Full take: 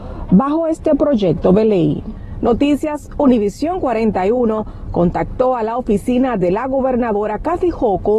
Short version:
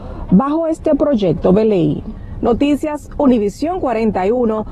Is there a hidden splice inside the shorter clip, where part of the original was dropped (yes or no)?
no